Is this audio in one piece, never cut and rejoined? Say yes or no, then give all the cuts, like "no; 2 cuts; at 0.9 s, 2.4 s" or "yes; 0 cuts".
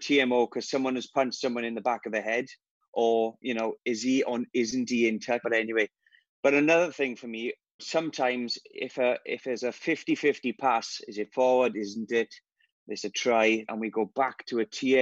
no; 3 cuts; at 5.4 s, 7.8 s, 13.6 s